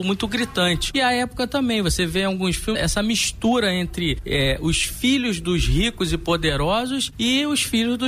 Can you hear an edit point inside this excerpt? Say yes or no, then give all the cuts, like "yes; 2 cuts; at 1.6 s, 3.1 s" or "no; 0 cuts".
yes; 1 cut; at 2.7 s